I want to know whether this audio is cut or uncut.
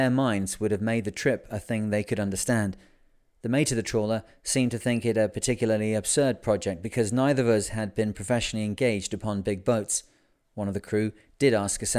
uncut